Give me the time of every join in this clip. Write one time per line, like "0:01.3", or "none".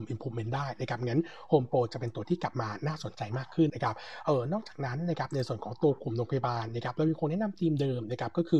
0:03.7